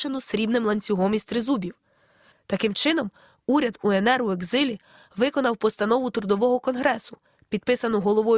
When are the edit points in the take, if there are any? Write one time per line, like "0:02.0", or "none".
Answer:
0:02.3